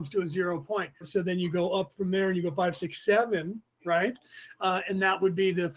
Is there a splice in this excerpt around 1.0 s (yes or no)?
yes